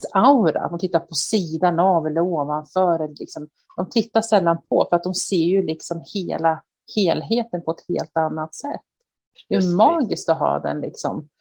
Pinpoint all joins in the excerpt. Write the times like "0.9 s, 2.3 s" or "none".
none